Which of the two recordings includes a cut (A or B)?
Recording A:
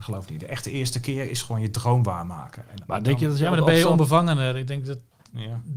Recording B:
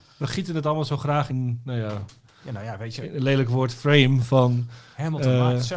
B